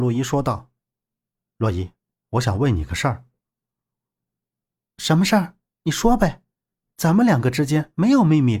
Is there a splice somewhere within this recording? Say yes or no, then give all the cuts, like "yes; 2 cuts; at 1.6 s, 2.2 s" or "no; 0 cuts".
no; 0 cuts